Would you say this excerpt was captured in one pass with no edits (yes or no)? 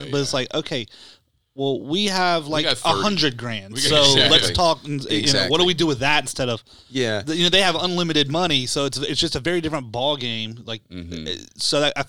yes